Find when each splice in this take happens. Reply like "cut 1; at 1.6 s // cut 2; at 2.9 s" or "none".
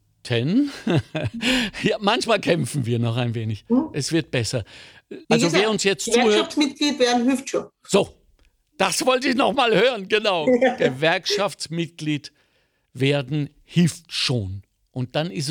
cut 1; at 5.2 s